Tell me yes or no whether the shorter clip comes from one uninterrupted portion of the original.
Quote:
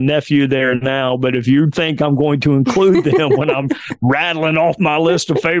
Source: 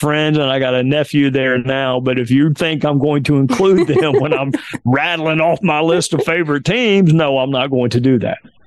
yes